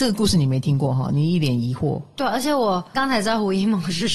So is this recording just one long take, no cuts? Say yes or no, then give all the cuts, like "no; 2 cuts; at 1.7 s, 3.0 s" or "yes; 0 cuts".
no; 1 cut; at 2.9 s